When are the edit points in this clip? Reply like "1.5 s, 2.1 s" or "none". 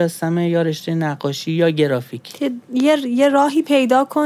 none

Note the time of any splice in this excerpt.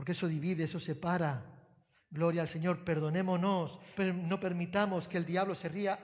2.0 s, 4.0 s

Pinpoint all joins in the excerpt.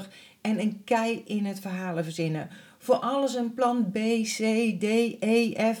none

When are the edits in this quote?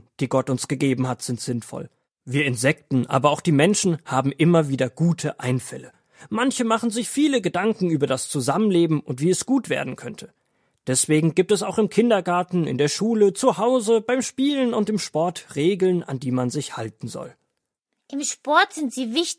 none

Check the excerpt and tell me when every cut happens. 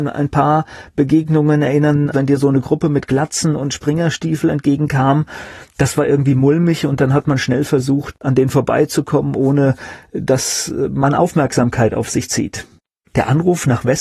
2.1 s

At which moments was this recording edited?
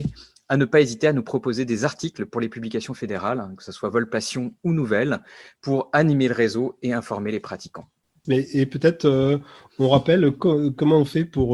8.2 s

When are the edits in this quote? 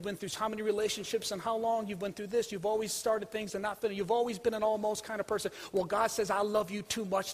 none

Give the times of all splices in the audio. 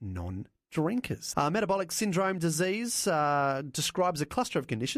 1.3 s

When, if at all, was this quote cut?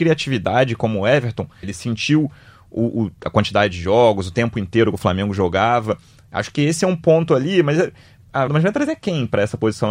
1.6 s, 8.5 s

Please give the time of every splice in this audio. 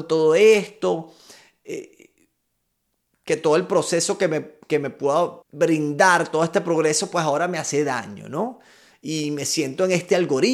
5.4 s

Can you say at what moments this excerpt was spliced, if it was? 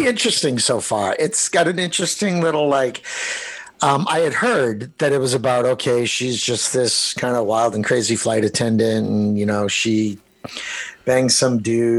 none

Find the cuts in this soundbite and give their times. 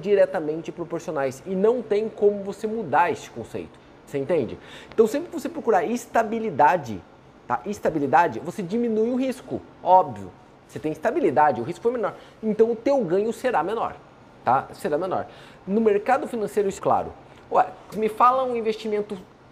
16.8 s, 17.9 s

